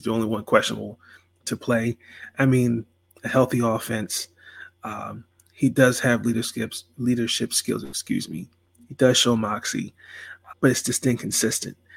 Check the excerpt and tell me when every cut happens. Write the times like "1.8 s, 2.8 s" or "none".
6.9 s, 10.5 s